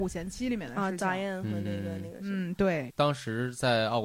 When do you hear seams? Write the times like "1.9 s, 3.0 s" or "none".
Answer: 2.9 s